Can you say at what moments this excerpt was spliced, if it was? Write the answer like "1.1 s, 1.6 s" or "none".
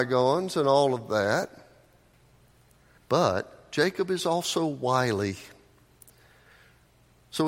3.0 s